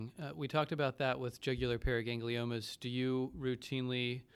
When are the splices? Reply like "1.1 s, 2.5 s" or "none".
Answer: none